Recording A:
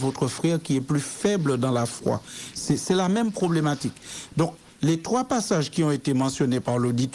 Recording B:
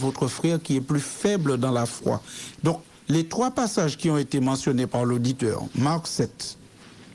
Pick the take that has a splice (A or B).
B